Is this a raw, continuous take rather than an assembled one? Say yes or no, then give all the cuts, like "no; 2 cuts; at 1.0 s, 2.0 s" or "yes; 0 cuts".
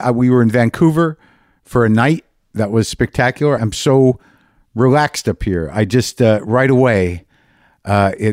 no; 1 cut; at 3.6 s